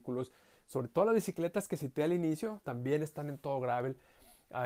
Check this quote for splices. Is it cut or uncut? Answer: cut